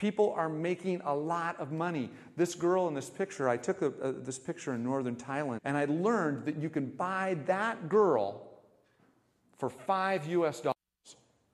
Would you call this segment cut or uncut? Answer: cut